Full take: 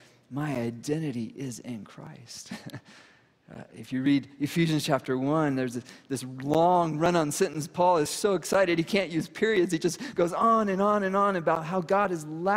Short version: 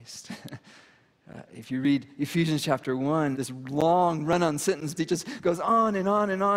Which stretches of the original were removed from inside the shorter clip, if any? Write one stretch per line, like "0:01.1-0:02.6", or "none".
0:05.5-0:06.1
0:07.7-0:09.7